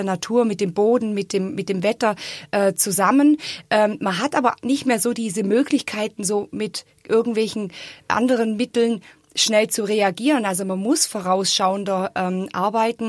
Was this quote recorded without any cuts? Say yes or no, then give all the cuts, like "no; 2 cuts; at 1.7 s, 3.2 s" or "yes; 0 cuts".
yes; 0 cuts